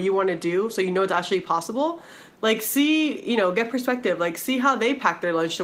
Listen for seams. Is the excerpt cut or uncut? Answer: cut